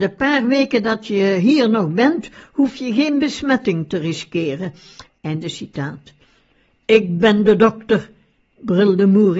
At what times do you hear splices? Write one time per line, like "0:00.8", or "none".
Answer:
0:05.1

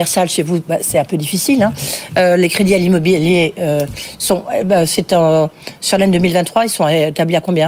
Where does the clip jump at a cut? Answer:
none

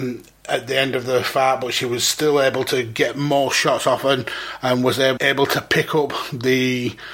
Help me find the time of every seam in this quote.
0:05.2

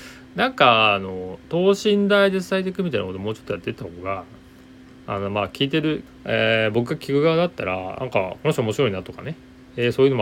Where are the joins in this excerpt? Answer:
0:06.1

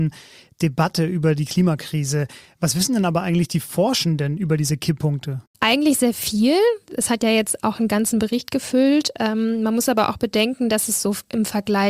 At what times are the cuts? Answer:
none

